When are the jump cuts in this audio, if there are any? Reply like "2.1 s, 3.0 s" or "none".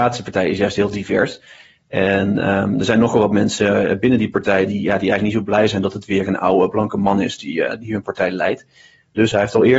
none